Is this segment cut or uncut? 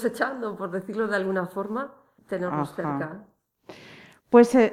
cut